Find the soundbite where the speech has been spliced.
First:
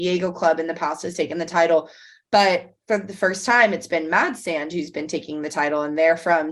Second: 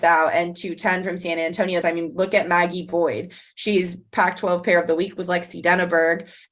second; 1 cut; at 1.8 s

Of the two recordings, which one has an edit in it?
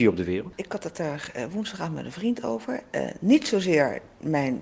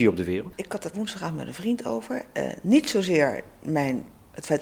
second; 1 cut; at 0.9 s

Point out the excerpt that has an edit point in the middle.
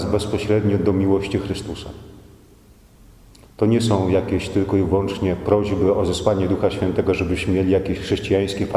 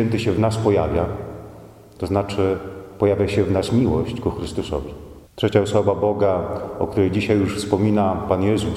second; 1 cut; at 5.3 s

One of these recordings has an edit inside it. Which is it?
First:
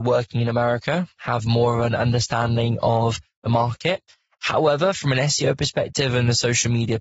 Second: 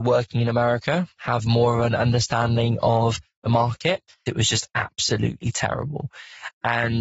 second; 1 cut; at 4.3 s

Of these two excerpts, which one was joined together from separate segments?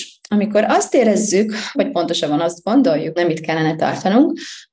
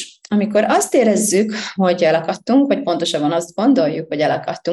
first; 2 cuts; at 1.7 s, 3.2 s

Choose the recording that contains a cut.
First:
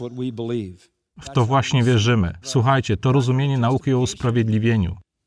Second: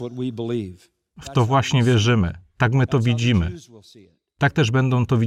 first; 1 cut; at 2.4 s

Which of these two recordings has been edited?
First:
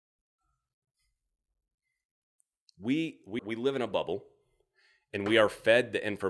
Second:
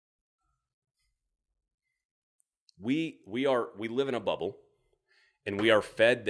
first; 1 cut; at 3.4 s

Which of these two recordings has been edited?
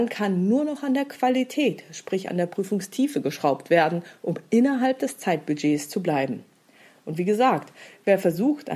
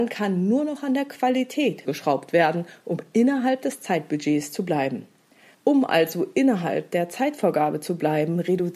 second; 2 cuts; at 1.8 s, 5.5 s

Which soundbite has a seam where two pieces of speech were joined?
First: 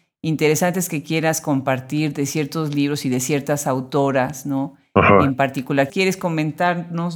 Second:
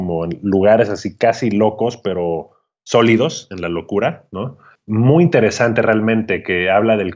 first; 1 cut; at 5.9 s

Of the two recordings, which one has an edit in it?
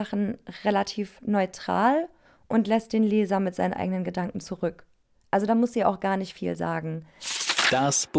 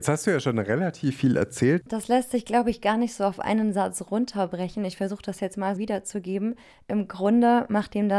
second; 2 cuts; at 1.8 s, 5.8 s

